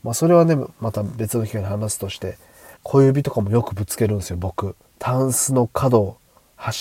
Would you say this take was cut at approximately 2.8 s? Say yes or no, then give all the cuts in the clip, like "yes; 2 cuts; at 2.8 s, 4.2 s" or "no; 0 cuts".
yes; 2 cuts; at 2.8 s, 4.9 s